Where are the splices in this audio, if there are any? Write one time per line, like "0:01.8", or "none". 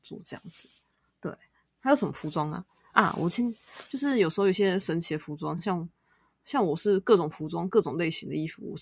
none